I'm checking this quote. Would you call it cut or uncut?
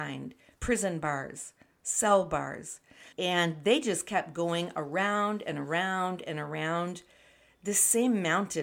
cut